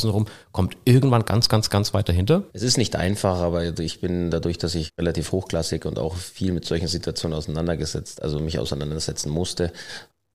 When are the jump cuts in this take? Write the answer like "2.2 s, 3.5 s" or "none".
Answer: 2.5 s